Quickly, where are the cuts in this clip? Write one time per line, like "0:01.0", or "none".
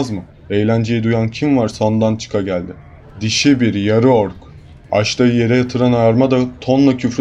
0:03.0